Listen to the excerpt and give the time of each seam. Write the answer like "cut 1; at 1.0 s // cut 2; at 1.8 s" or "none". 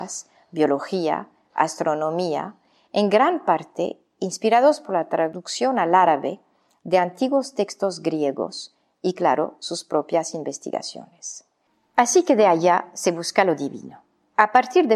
none